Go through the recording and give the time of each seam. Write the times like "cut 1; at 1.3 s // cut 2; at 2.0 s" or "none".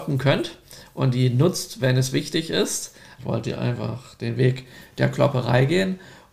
cut 1; at 3.2 s